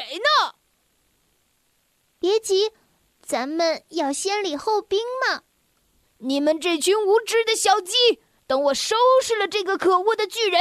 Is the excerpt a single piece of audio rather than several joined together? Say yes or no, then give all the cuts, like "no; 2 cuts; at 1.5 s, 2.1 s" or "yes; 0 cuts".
no; 2 cuts; at 3.0 s, 6.0 s